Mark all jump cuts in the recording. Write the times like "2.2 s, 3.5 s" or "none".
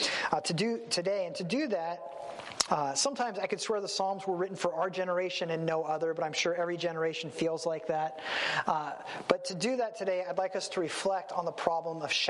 2.7 s